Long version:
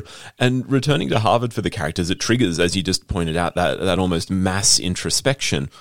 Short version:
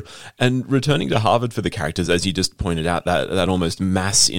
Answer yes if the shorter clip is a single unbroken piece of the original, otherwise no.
no